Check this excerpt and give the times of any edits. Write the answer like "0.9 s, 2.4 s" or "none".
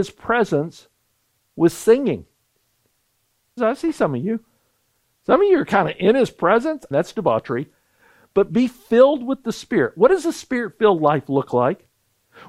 3.6 s, 6.9 s